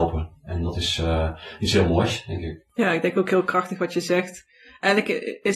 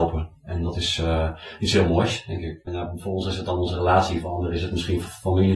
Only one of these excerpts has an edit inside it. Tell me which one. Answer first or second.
second